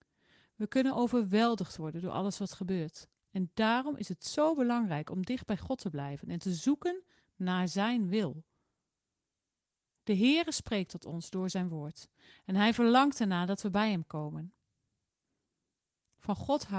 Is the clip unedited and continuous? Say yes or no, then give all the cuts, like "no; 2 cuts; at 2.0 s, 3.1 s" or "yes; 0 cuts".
yes; 0 cuts